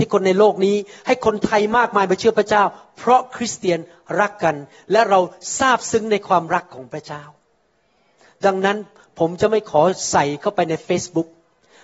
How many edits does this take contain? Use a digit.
0